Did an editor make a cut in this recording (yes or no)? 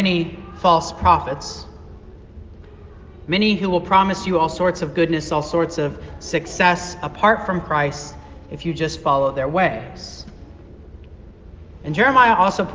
no